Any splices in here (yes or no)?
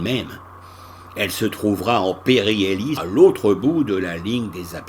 yes